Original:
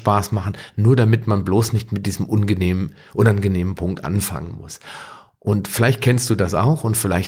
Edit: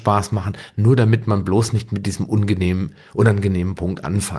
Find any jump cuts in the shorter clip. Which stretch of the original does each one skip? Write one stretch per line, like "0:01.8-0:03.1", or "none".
none